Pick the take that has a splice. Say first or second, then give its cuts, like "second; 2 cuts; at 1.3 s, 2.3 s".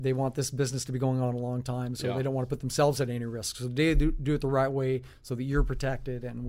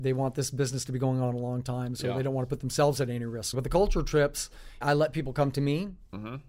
second; 2 cuts; at 3.5 s, 4.8 s